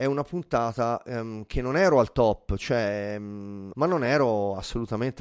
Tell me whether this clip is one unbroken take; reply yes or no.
no